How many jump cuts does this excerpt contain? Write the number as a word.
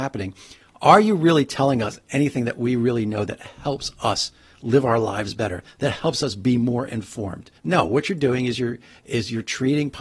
one